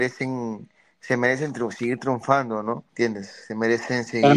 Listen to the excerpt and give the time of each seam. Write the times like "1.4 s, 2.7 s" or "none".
2.9 s